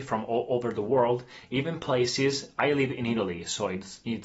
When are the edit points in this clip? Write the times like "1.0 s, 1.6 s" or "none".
none